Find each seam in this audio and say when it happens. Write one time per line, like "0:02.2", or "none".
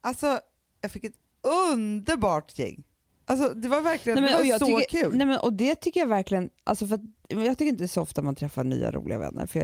0:07.2